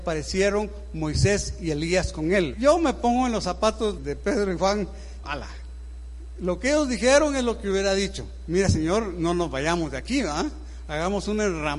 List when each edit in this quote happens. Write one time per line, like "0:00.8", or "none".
0:02.5
0:04.0
0:05.2